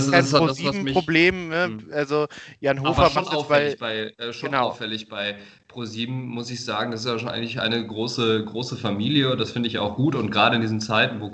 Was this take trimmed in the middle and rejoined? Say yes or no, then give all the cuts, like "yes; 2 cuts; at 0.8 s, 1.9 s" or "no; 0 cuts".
no; 0 cuts